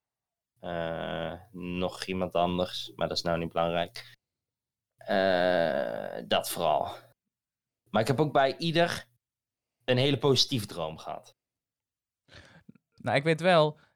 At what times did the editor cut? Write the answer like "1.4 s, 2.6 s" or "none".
13.0 s